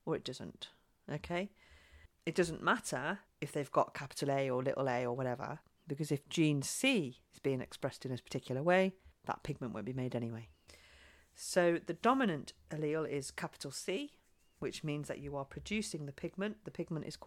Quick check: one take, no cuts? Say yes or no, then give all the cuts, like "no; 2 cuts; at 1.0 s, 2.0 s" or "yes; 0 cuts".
yes; 0 cuts